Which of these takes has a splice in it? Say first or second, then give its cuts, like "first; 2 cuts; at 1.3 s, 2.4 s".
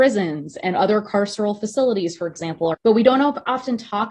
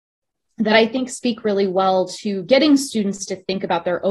first; 1 cut; at 2.7 s